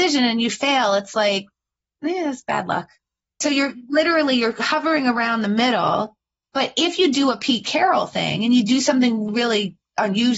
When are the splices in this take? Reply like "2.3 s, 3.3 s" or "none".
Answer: 3.2 s, 9.3 s